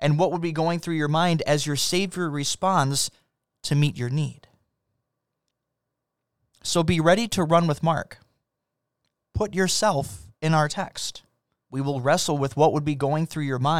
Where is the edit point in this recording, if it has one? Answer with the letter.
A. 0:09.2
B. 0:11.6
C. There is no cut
B